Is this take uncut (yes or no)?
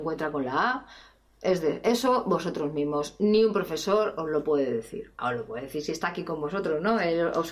yes